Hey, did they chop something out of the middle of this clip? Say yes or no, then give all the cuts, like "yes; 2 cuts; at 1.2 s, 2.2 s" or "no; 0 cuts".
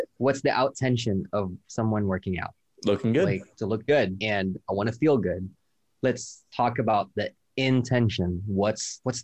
yes; 1 cut; at 3.5 s